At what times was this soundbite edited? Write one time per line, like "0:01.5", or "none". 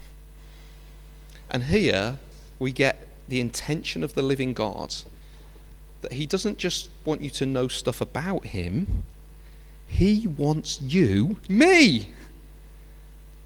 0:11.5